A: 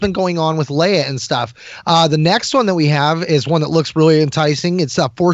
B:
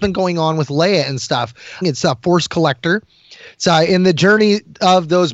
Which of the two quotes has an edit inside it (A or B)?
B